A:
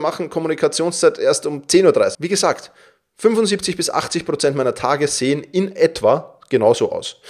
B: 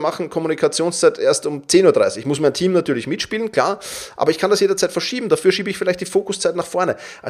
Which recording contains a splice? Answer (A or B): A